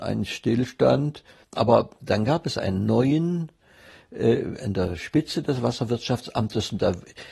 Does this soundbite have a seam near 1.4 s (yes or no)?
yes